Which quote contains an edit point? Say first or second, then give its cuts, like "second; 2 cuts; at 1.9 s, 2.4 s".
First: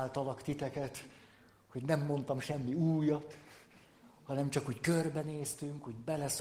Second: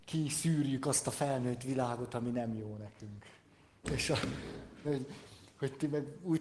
second; 2 cuts; at 3.8 s, 4.8 s